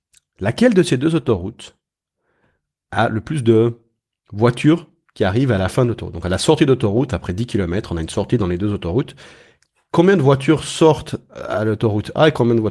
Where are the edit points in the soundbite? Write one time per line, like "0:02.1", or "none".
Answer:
none